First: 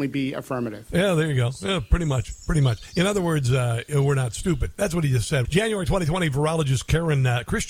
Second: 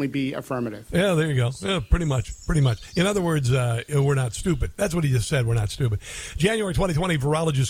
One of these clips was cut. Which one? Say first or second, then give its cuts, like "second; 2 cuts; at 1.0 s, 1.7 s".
first; 1 cut; at 5.4 s